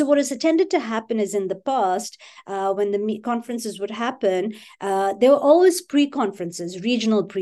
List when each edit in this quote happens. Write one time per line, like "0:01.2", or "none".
none